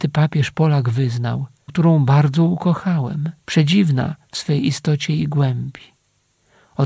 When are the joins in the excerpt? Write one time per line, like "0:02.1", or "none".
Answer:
0:01.7
0:03.4